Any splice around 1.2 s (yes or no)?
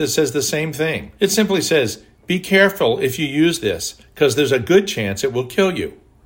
yes